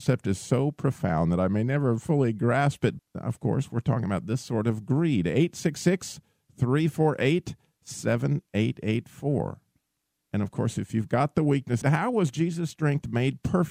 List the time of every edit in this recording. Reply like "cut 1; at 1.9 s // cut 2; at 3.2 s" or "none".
cut 1; at 3.0 s // cut 2; at 11.8 s